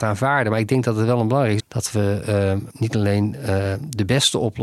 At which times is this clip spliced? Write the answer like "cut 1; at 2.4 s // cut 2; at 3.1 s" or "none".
cut 1; at 1.6 s // cut 2; at 2.7 s